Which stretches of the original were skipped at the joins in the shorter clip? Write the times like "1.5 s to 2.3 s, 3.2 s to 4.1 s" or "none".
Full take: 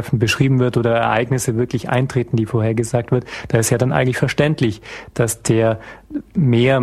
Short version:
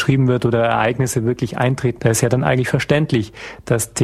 2.3 s to 3.5 s